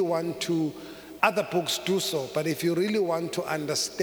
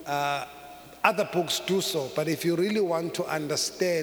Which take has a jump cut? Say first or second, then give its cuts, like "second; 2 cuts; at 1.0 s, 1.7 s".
first; 1 cut; at 1.2 s